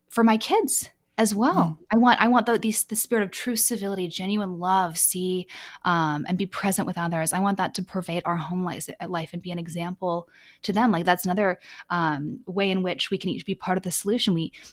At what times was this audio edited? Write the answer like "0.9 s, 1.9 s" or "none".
4.9 s